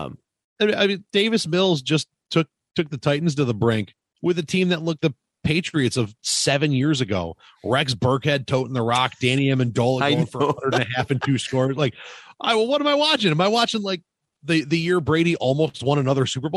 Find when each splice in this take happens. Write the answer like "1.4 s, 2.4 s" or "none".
5.0 s